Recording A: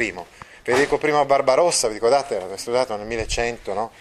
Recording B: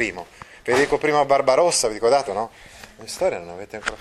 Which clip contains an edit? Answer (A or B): B